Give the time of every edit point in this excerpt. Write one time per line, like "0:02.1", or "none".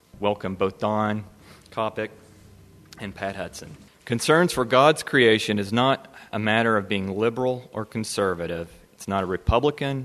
0:03.9